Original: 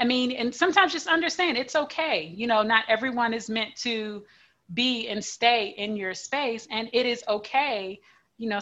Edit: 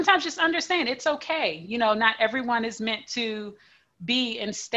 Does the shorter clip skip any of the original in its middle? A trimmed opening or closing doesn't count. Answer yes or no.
no